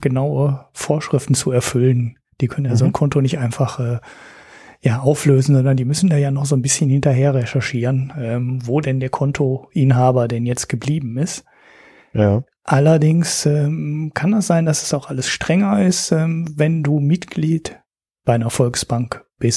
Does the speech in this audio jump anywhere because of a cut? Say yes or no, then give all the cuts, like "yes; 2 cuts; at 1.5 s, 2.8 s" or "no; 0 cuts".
no; 0 cuts